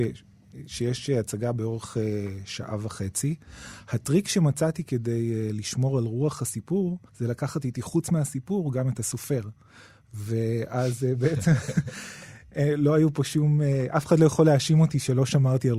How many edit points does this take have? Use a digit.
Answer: 1